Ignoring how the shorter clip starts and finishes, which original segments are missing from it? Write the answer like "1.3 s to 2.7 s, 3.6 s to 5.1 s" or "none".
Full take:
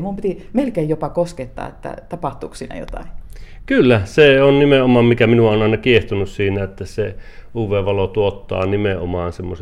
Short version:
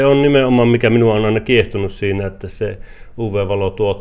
none